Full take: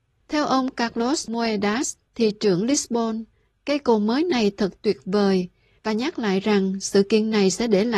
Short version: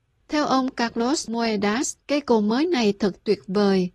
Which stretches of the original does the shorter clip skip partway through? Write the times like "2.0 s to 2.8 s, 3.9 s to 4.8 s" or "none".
2.0 s to 3.6 s